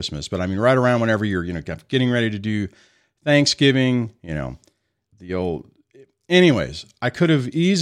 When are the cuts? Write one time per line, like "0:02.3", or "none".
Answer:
0:05.1